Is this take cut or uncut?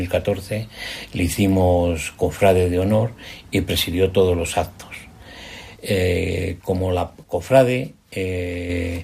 cut